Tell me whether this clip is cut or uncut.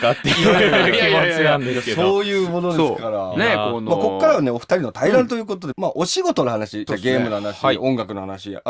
cut